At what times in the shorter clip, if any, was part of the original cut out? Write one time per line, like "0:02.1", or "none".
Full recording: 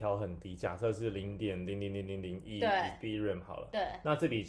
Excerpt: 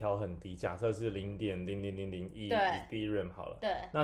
0:01.8